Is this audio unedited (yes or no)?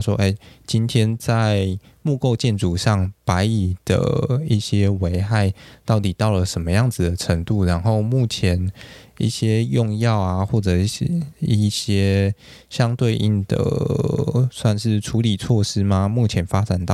yes